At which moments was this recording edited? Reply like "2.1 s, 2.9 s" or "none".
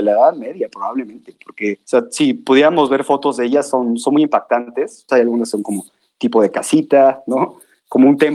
5.1 s

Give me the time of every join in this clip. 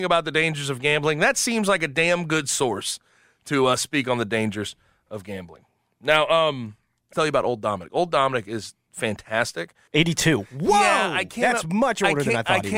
7.1 s, 9.9 s

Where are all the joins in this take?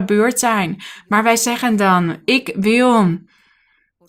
none

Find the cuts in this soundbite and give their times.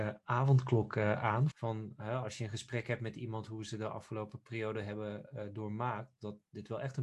1.5 s

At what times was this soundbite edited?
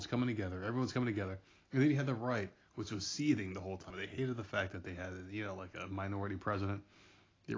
3.9 s

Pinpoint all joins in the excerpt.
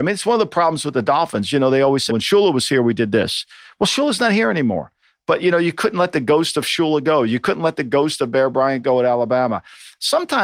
2.1 s

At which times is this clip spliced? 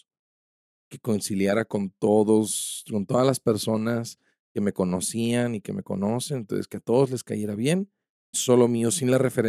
8.3 s

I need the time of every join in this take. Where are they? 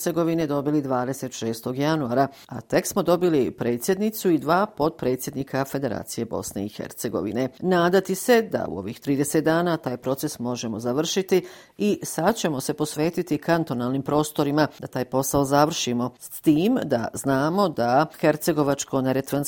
none

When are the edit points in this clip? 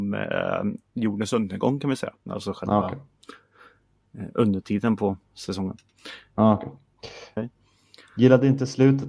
2.2 s, 7.4 s

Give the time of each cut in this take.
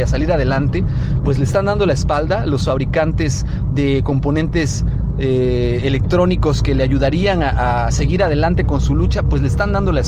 none

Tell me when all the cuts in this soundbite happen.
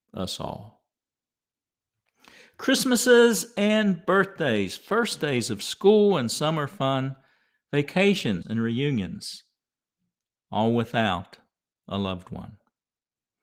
8.4 s

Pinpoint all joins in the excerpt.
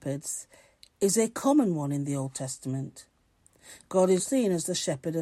4.2 s

